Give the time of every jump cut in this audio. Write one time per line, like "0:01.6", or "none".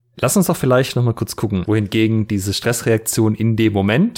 0:01.6